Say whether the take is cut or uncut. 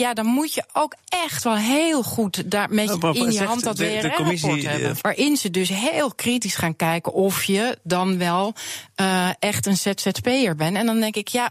cut